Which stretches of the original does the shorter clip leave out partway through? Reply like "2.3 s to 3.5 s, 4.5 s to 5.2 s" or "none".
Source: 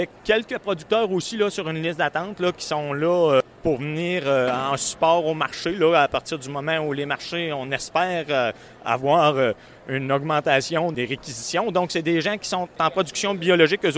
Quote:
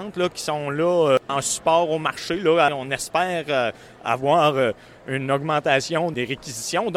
3.5 s to 4.6 s, 6.0 s to 7.5 s